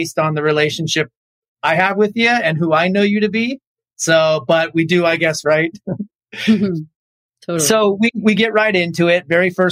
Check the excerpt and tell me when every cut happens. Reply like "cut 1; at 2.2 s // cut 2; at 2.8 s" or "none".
cut 1; at 5.4 s